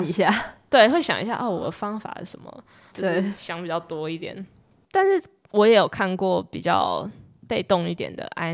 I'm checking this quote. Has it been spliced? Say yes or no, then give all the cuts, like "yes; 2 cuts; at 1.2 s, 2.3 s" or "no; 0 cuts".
yes; 1 cut; at 2.9 s